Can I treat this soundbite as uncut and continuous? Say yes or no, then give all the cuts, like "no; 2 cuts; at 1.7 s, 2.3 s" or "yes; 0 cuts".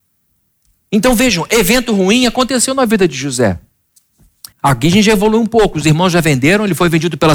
no; 1 cut; at 4.5 s